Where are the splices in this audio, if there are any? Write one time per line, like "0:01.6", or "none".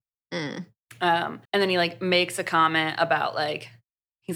0:01.5